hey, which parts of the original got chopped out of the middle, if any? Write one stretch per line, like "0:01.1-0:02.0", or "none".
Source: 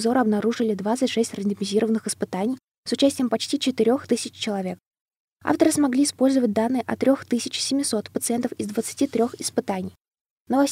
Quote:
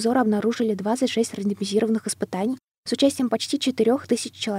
none